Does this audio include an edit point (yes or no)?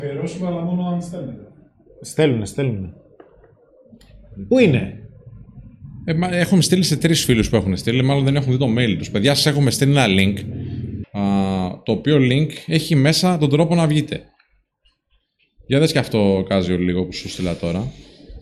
yes